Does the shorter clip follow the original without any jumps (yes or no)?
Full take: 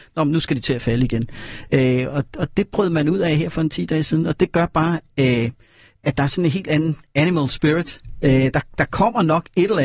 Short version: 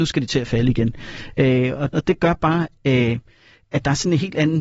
no